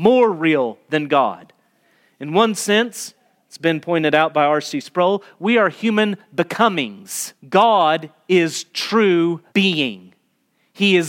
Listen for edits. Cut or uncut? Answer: cut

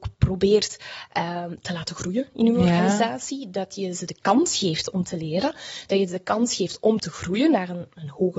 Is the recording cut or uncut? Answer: uncut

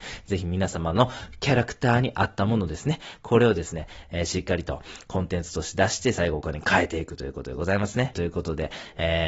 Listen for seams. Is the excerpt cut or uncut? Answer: cut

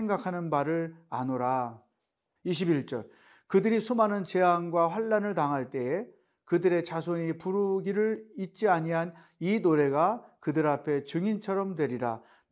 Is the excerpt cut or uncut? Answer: cut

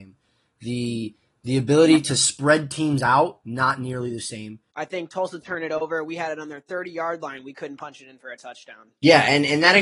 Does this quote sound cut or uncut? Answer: cut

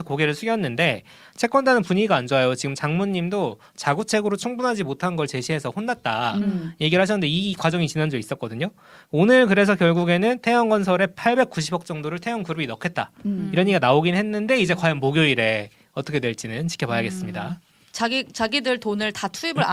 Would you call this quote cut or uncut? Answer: uncut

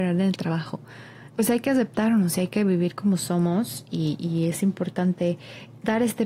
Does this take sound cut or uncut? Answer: cut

